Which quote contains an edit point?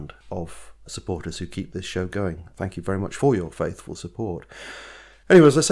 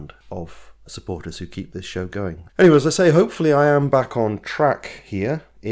second; 1 cut; at 2.5 s

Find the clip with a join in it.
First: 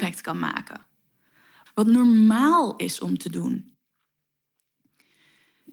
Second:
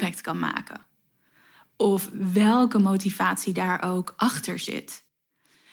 first; 1 cut; at 1.7 s

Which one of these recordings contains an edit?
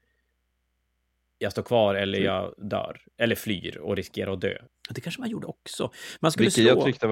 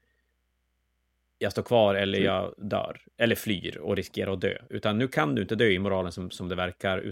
first; 1 cut; at 4.7 s

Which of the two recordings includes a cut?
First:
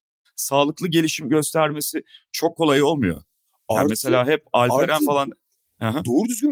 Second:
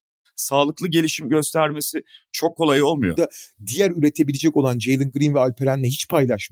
second; 1 cut; at 3.2 s

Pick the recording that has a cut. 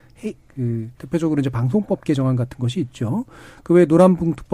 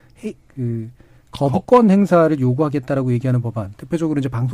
first; 1 cut; at 1.0 s

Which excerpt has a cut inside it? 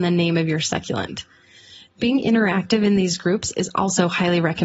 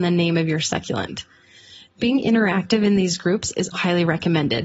second; 1 cut; at 3.7 s

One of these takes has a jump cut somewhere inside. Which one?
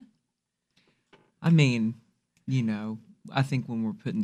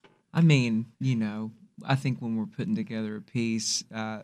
second; 1 cut; at 0.9 s

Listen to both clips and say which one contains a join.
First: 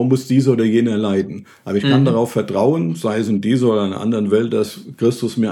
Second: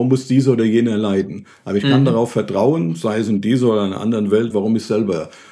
second; 1 cut; at 4.5 s

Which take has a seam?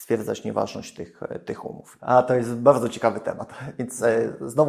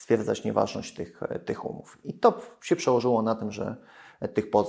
first; 1 cut; at 2.0 s

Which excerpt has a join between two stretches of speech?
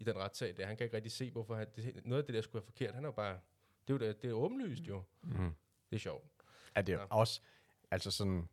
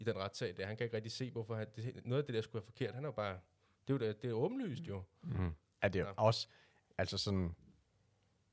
second; 1 cut; at 5.8 s

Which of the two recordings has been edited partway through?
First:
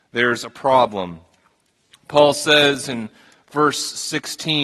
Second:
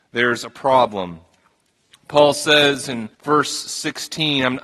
second; 1 cut; at 3.1 s

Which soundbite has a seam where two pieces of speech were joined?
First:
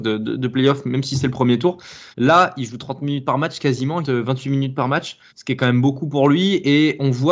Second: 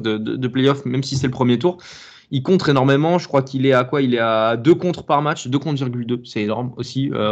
first; 3 cuts; at 2.1 s, 4.0 s, 5.3 s

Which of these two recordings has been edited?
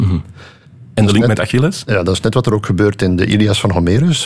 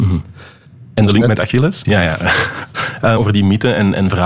second; 2 cuts; at 1.8 s, 3.2 s

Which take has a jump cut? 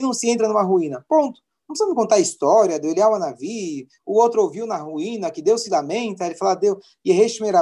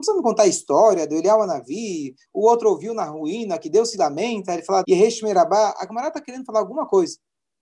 second; 1 cut; at 4.8 s

